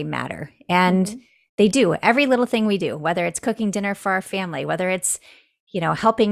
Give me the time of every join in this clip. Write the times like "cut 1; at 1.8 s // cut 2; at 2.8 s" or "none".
none